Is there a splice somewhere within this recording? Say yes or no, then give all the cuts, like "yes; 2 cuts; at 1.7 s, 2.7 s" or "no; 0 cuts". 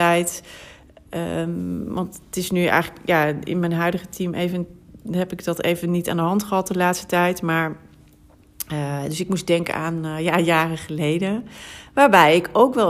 no; 0 cuts